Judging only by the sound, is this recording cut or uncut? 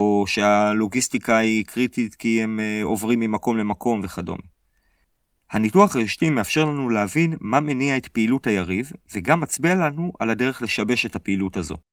uncut